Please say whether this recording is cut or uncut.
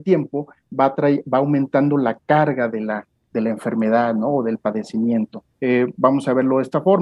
cut